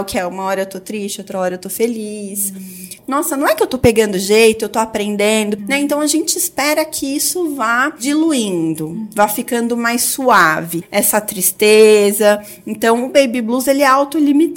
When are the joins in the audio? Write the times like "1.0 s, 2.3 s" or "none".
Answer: 3.0 s, 5.6 s, 10.8 s